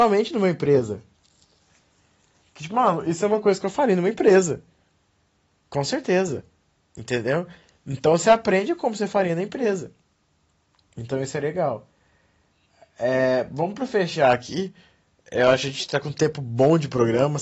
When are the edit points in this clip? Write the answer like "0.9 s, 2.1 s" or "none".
none